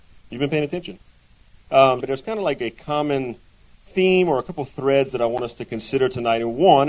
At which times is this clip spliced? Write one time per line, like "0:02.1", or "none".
0:02.0